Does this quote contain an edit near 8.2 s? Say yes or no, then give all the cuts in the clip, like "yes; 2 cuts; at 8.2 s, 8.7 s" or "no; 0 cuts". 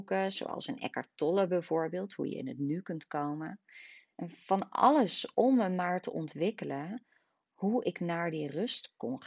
no; 1 cut; at 4.1 s